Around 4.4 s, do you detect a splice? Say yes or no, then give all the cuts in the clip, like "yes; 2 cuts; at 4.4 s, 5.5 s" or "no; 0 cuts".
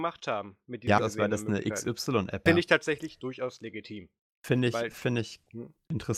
no; 2 cuts; at 1.0 s, 2.5 s